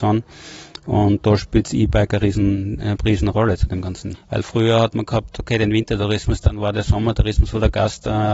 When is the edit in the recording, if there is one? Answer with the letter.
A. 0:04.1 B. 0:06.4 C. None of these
A